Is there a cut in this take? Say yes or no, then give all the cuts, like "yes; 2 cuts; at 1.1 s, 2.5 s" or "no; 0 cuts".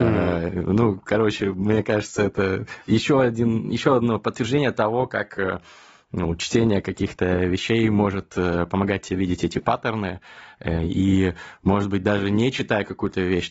no; 0 cuts